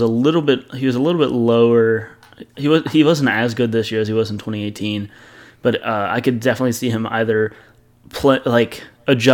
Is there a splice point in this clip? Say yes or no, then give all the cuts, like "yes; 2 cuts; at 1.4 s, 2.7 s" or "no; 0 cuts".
no; 0 cuts